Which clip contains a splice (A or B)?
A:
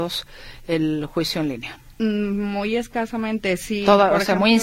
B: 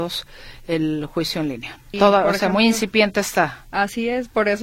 B